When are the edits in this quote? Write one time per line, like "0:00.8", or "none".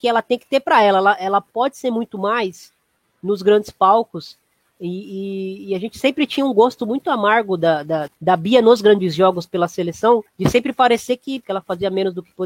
0:08.1
0:10.3
0:11.4

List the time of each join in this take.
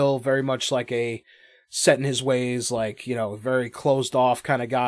none

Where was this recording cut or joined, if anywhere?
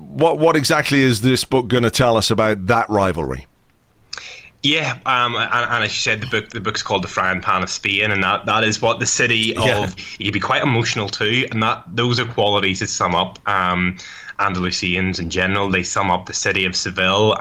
0:10.0

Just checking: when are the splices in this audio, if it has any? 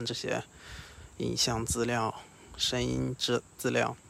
none

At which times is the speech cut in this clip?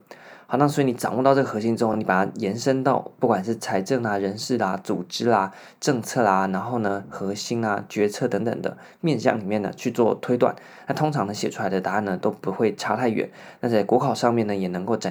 none

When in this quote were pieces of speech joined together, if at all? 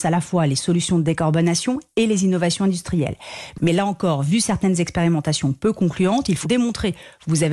0:06.4

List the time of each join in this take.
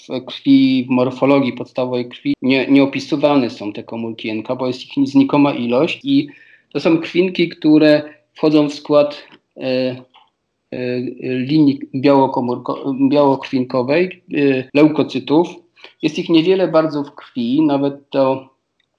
0:02.3
0:06.0
0:14.7

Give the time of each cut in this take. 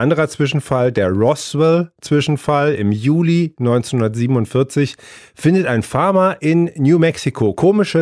none

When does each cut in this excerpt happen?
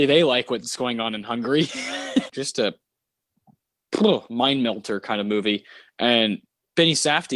0:02.3

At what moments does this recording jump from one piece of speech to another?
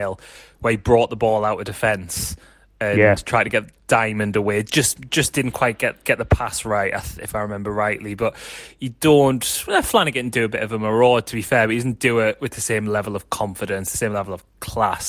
none

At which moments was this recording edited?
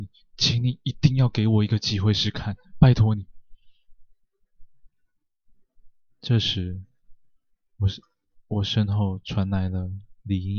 0:02.1

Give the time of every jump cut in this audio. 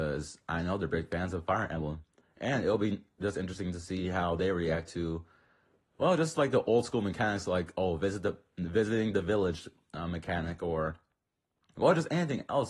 none

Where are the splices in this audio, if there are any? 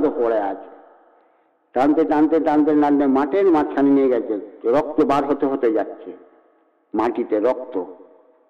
none

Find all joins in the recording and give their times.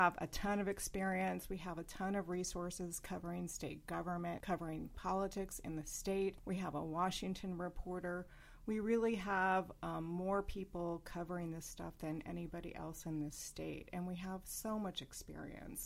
none

